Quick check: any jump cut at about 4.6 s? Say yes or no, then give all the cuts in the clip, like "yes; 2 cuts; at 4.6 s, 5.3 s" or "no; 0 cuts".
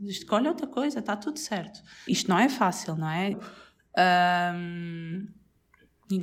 no; 2 cuts; at 2.1 s, 3.3 s